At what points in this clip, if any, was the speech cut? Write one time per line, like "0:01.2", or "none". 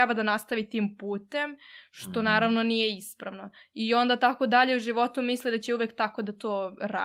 none